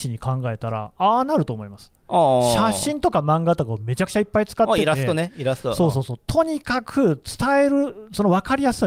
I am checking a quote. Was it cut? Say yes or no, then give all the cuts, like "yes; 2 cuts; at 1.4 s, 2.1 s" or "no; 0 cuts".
no; 0 cuts